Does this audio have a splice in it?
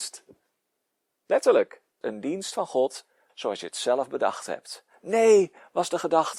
yes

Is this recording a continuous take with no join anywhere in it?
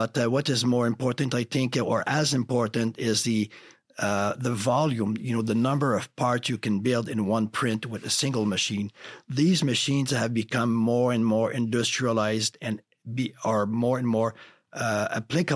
yes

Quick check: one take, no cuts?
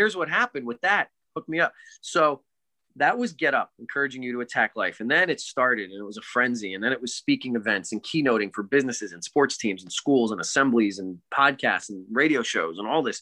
no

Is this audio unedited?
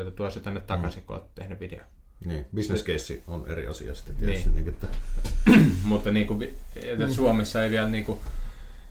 yes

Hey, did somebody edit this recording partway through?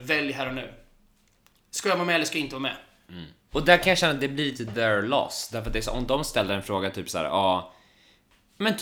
yes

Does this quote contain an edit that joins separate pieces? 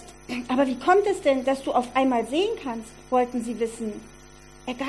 no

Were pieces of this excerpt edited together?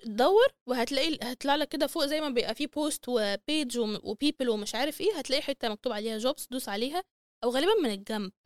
no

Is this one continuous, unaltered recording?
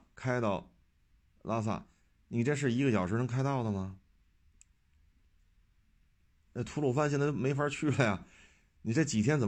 no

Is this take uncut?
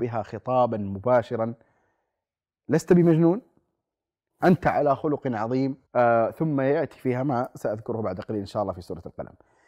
no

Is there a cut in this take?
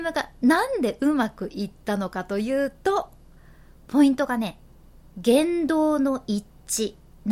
no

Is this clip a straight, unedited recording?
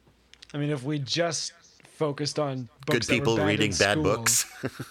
no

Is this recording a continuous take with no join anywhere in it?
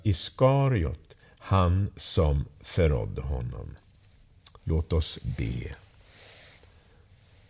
no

